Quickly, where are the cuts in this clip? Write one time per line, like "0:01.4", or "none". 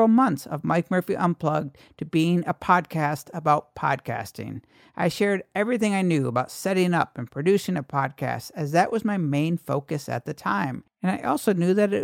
none